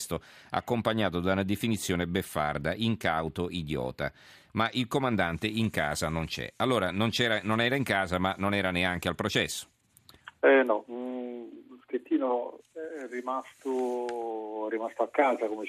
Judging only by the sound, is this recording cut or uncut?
uncut